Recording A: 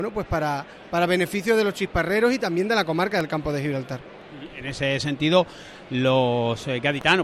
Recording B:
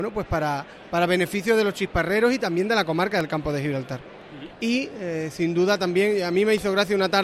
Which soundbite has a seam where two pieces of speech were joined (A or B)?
B